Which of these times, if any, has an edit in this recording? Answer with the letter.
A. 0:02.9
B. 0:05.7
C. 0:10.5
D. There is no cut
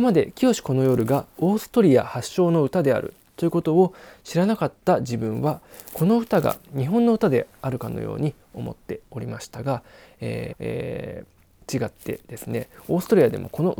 C